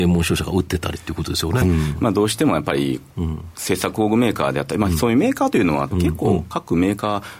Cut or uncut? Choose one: cut